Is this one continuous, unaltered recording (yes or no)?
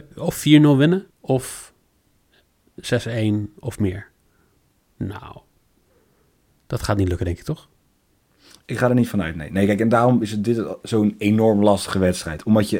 no